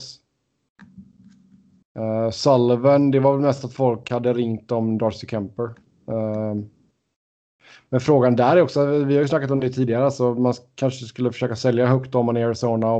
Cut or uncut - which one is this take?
uncut